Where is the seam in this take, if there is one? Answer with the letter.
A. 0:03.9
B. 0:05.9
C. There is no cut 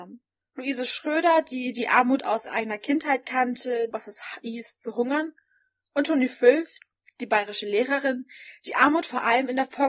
A